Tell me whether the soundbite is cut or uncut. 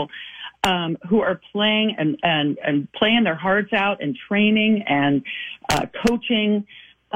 uncut